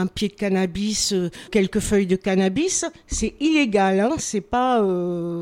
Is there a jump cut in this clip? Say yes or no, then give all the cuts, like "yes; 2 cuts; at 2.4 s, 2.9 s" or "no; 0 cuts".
yes; 1 cut; at 1.5 s